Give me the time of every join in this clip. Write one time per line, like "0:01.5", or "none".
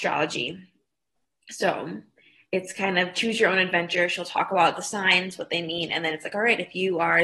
none